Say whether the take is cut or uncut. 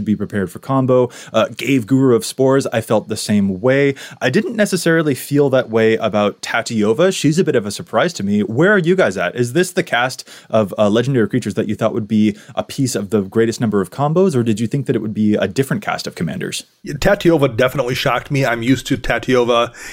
uncut